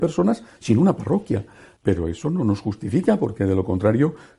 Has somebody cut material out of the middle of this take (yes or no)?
yes